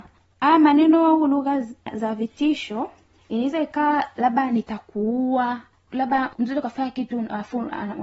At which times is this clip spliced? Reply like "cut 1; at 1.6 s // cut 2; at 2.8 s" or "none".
none